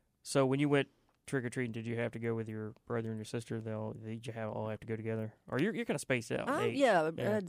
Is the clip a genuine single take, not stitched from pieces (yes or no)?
yes